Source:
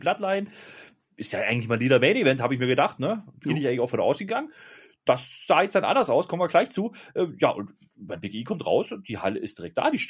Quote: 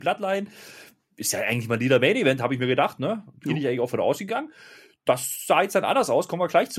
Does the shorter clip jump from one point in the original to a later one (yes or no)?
no